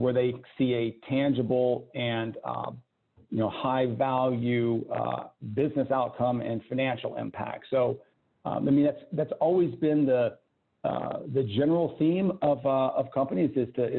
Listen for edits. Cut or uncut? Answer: uncut